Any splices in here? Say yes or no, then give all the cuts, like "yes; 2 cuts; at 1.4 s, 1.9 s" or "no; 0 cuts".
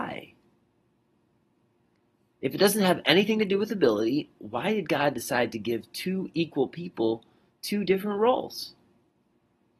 no; 0 cuts